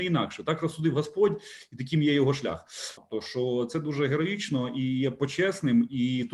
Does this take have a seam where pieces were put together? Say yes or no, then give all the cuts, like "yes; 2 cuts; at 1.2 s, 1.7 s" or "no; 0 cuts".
yes; 1 cut; at 3.0 s